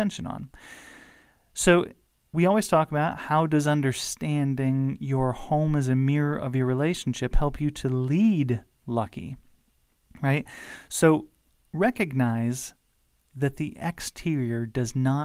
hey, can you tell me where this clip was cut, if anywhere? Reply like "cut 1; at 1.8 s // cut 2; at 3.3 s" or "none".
none